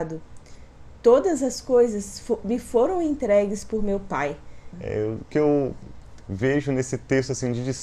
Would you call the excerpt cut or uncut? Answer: cut